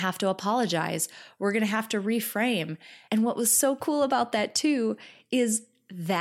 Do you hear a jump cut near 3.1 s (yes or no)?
yes